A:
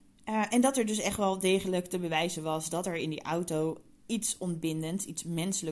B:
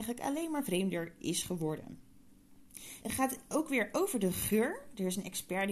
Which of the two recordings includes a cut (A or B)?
B